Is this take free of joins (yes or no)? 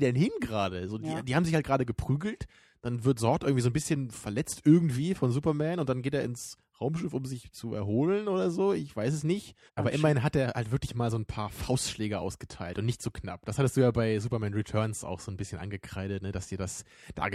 no